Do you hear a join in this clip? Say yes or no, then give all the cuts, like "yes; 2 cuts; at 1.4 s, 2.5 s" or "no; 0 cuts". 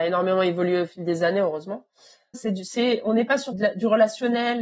yes; 2 cuts; at 2.3 s, 3.5 s